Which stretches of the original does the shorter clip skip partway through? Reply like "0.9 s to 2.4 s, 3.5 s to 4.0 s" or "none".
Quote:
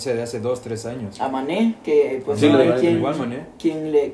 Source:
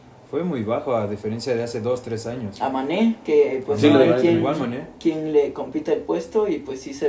none